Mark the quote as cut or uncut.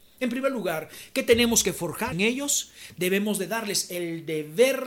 cut